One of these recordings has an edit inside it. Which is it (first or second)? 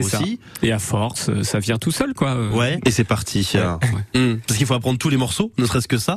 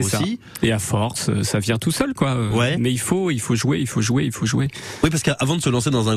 first